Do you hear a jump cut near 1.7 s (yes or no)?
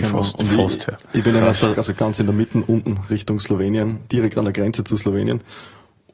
yes